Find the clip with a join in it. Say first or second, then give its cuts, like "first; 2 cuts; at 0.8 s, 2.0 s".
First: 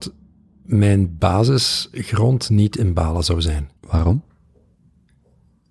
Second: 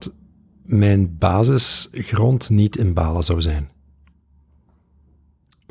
first; 1 cut; at 3.8 s